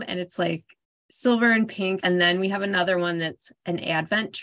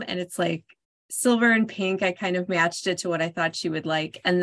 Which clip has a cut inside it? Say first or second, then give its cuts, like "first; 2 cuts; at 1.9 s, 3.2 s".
first; 1 cut; at 2.0 s